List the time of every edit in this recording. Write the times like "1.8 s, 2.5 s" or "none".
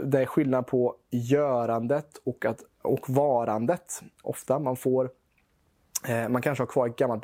2.7 s, 4.2 s